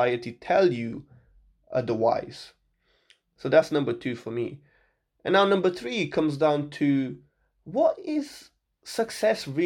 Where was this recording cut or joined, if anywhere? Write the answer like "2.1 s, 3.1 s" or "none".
none